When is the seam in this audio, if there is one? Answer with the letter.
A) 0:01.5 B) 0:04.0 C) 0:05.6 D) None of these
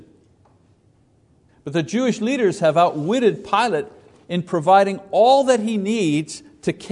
A